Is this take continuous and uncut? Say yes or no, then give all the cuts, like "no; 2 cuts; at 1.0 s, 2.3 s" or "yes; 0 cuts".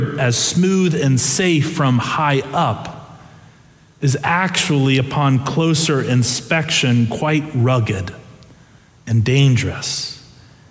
yes; 0 cuts